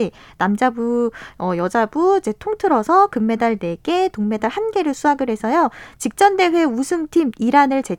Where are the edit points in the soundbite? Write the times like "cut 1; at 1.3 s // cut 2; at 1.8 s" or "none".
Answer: none